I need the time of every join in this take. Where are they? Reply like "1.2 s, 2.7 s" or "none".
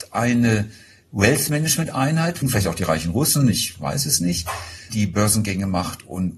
2.4 s, 4.9 s